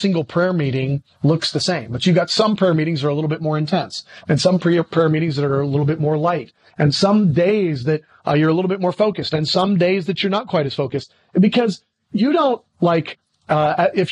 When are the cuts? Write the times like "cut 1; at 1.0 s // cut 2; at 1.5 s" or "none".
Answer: none

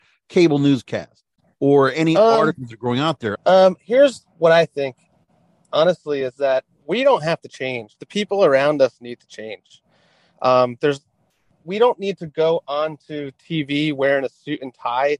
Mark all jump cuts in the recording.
cut 1; at 3.3 s

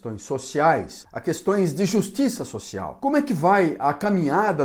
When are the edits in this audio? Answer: cut 1; at 1.0 s

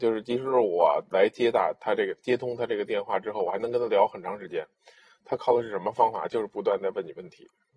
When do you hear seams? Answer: none

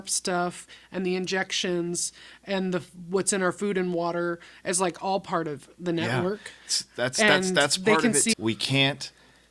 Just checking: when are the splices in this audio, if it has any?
cut 1; at 8.3 s

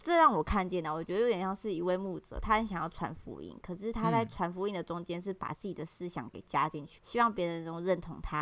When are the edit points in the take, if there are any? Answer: cut 1; at 7.0 s

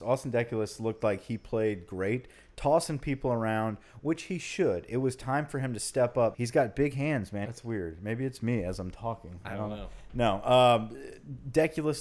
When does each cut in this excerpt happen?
cut 1; at 6.3 s // cut 2; at 7.4 s

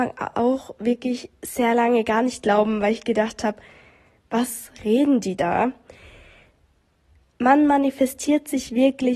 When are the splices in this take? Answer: none

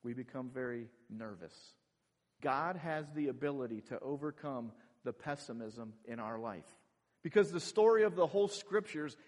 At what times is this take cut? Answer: cut 1; at 2.4 s // cut 2; at 7.1 s

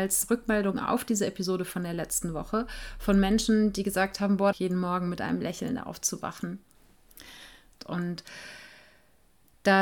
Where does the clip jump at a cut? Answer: cut 1; at 4.5 s // cut 2; at 7.8 s

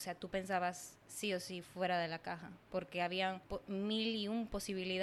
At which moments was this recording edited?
none

